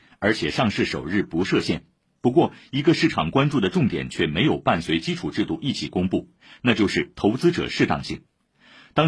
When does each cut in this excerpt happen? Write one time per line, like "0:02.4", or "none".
none